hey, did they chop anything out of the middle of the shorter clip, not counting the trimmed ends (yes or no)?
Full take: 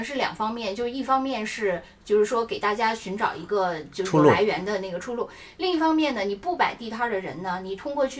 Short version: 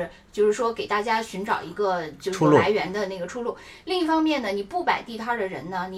no